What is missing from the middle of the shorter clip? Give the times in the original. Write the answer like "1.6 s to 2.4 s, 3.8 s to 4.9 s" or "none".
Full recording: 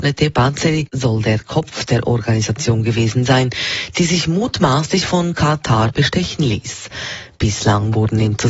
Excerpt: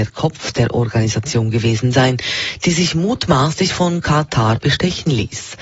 none